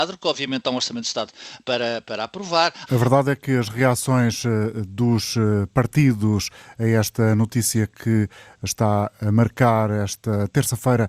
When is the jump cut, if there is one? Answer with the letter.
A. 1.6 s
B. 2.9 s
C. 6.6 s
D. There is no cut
B